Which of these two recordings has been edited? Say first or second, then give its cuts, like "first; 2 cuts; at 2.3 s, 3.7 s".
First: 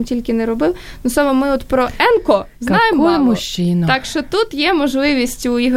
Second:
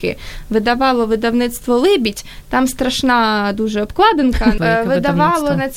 second; 1 cut; at 4.6 s